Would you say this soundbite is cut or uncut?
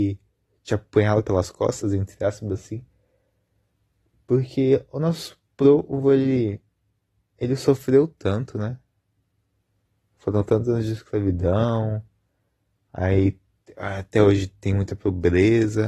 uncut